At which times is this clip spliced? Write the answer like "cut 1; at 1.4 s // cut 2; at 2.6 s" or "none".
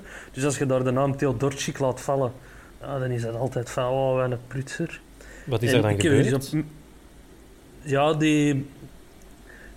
none